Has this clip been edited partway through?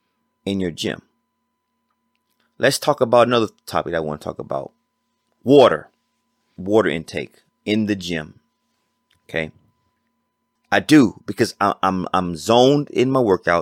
yes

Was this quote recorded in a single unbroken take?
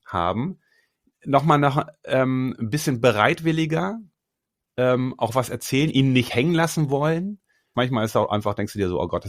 no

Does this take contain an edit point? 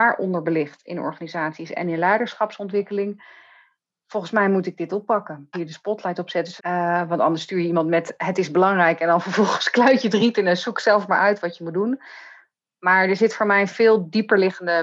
yes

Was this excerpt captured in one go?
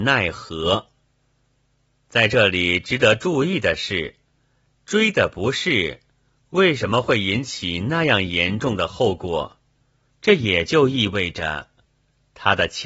no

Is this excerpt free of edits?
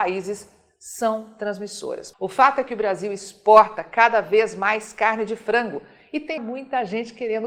no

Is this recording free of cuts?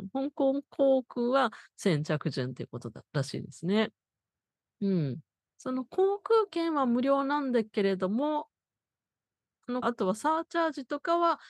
no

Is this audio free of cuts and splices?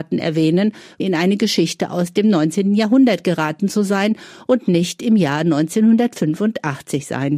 no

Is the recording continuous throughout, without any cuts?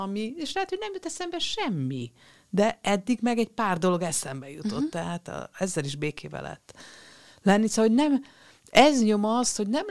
yes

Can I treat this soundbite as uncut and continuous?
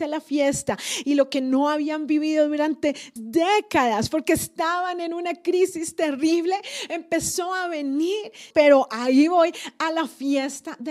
no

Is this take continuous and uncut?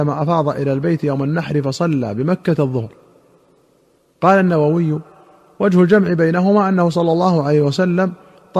yes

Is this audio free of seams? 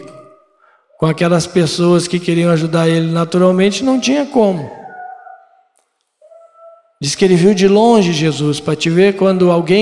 yes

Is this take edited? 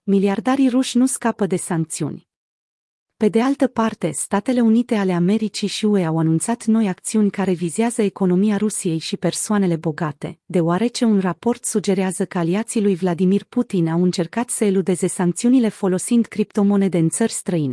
no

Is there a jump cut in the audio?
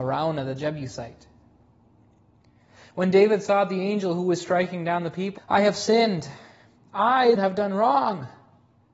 yes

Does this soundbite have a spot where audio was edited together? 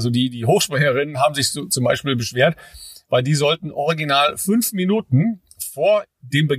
no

